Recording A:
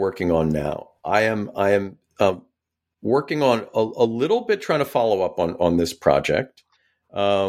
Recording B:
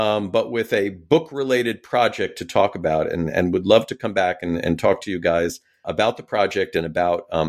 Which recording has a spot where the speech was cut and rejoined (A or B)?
B